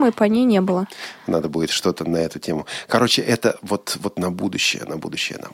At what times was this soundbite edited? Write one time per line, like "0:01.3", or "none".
none